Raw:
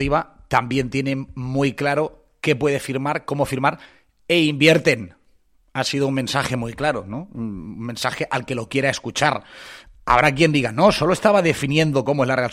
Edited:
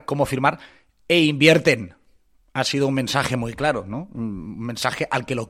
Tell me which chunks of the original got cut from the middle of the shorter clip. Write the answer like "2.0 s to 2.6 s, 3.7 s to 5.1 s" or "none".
none